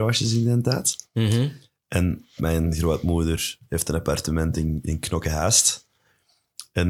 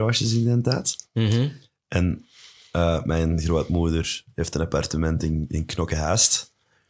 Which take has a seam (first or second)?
first